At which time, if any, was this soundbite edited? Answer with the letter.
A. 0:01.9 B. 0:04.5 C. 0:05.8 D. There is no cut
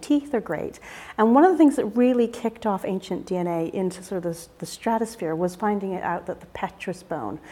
D